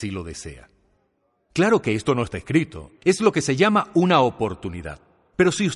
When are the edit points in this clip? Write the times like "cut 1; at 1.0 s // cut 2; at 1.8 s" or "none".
cut 1; at 3.0 s